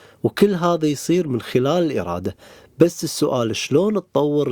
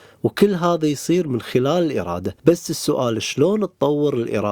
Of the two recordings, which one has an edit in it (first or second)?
second